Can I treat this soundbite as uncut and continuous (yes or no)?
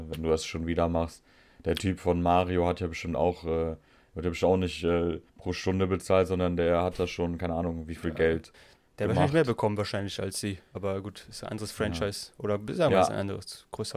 no